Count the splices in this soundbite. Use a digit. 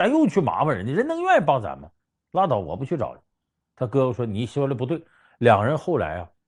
0